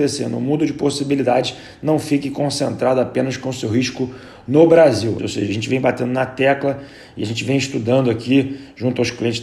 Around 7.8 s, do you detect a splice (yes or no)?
no